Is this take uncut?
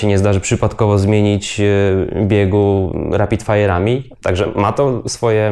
no; 1 cut; at 4.1 s

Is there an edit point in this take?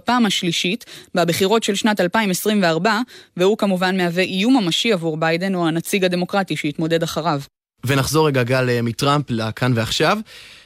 no; 0 cuts

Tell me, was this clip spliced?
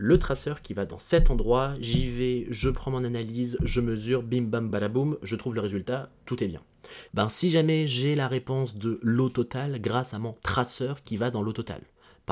yes; 2 cuts; at 4.7 s, 7.1 s

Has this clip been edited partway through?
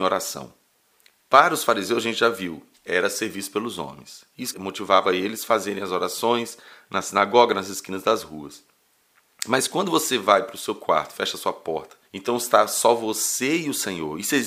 yes; 2 cuts; at 4.5 s, 12.0 s

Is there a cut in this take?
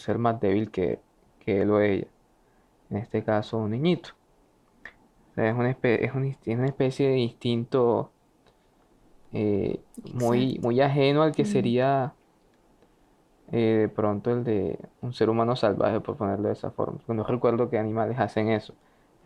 no; 0 cuts

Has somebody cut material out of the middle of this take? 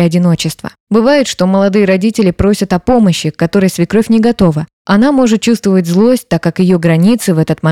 no; 0 cuts

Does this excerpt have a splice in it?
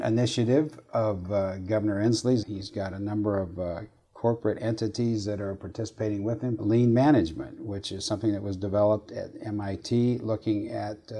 yes; 2 cuts; at 2.4 s, 6.6 s

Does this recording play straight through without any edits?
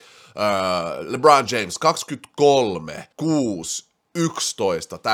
no; 1 cut; at 3.1 s

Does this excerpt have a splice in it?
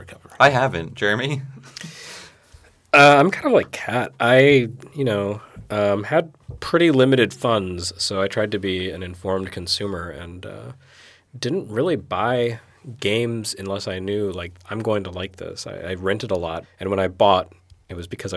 yes; 1 cut; at 16.6 s

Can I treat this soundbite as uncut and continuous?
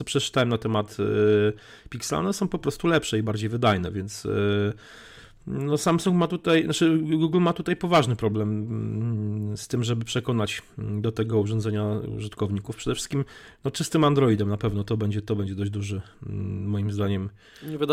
yes; 0 cuts

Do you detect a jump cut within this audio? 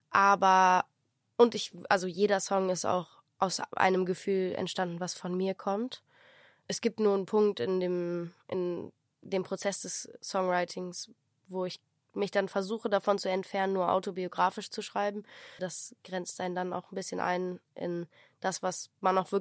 yes; 1 cut; at 15.6 s

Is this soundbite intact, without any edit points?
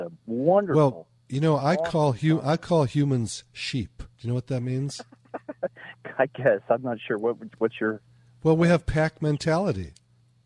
no; 1 cut; at 4.1 s

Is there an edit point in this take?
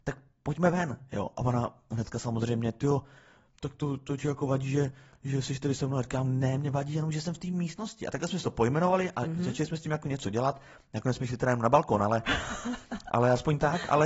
no; 0 cuts

